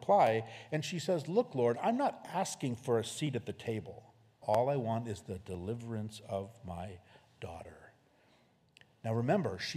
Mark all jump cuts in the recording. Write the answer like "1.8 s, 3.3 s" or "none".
4.4 s